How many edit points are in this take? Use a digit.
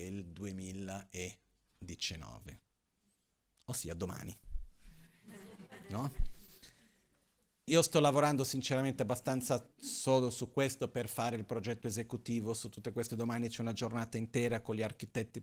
2